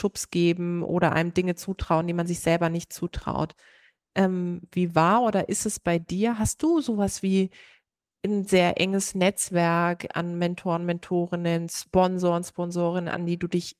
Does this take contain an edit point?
no; 0 cuts

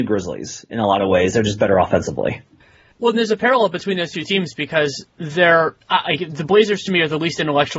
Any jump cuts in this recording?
no; 0 cuts

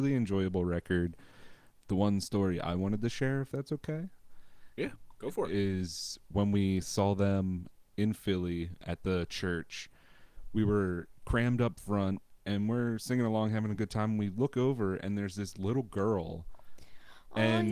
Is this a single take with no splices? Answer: yes; 0 cuts

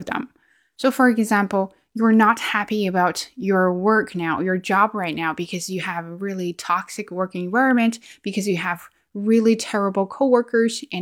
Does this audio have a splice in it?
no; 0 cuts

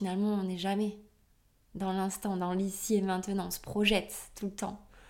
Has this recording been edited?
no; 0 cuts

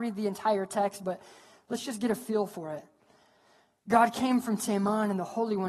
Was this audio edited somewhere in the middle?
no; 0 cuts

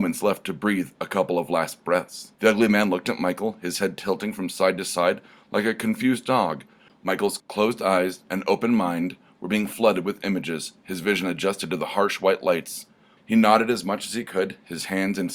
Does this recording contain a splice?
yes; 3 cuts; at 2.3 s, 6.9 s, 13.2 s

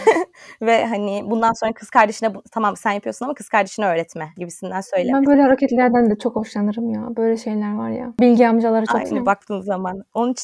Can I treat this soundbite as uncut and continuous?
no; 1 cut; at 9.1 s

